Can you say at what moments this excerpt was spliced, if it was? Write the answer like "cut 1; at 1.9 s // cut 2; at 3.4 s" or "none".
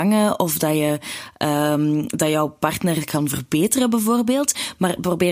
none